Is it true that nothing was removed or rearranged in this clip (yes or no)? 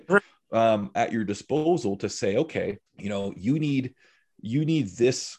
no